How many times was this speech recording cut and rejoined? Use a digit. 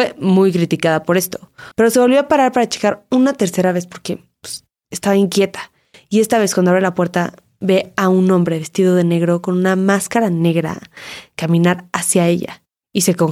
1